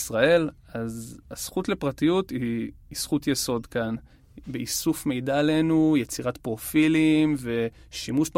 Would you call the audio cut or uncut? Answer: cut